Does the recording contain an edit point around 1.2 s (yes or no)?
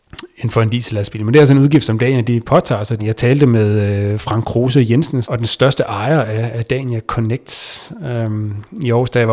no